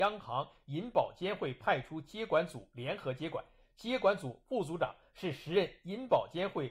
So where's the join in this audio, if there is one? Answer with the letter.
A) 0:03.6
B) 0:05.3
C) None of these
C